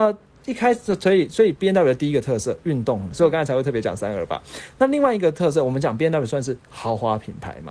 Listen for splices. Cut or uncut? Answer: cut